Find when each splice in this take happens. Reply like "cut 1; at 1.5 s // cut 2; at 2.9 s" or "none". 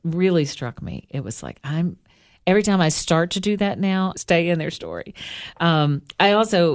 cut 1; at 4.1 s